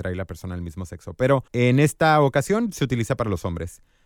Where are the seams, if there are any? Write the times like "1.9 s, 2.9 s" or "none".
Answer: 1.5 s